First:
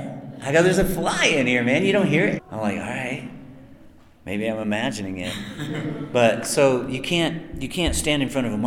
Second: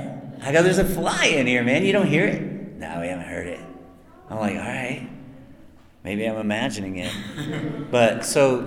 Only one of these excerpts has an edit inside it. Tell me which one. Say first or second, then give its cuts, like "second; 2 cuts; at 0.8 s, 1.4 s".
first; 1 cut; at 2.4 s